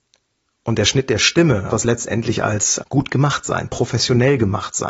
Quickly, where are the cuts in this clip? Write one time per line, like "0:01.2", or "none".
0:01.7
0:02.8